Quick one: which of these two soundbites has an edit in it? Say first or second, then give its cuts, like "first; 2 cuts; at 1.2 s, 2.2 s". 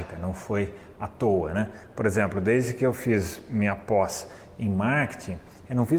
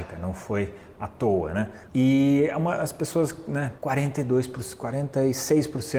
second; 2 cuts; at 1.9 s, 3.8 s